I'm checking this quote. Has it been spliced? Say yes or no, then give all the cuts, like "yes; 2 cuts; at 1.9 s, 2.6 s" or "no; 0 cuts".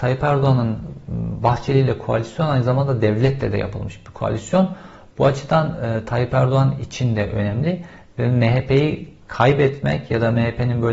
no; 0 cuts